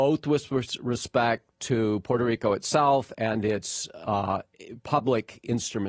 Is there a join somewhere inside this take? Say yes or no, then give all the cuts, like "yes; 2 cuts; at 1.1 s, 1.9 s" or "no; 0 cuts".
no; 0 cuts